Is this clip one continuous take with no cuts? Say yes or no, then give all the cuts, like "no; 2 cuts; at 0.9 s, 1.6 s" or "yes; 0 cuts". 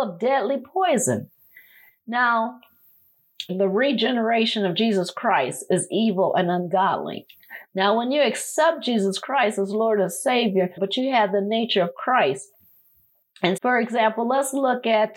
no; 3 cuts; at 3.5 s, 10.8 s, 13.6 s